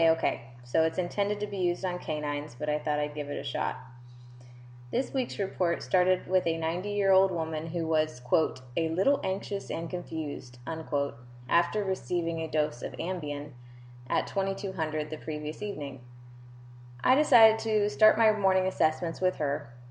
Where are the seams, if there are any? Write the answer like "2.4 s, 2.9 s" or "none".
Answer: none